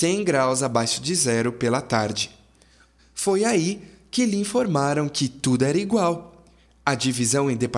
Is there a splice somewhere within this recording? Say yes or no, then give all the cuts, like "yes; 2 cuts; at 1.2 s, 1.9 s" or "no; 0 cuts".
yes; 1 cut; at 3.0 s